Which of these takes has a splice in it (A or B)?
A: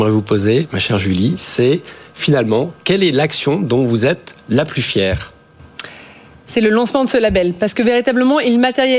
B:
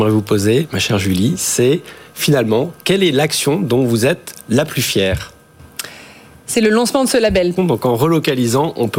B